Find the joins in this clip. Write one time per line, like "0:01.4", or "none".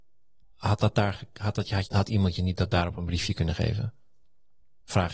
0:01.9